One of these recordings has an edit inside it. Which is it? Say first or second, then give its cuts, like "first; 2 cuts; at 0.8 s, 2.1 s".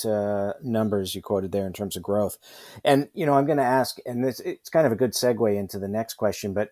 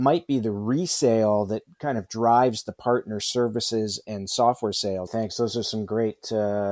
second; 1 cut; at 5.1 s